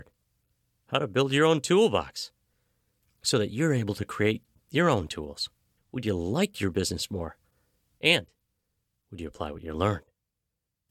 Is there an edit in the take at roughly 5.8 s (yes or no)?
yes